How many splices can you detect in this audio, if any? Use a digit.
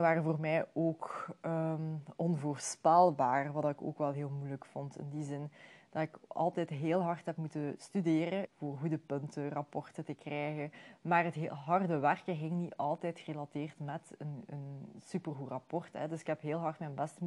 1